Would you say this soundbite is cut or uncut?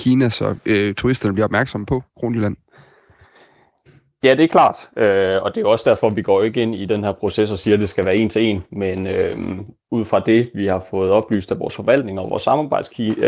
uncut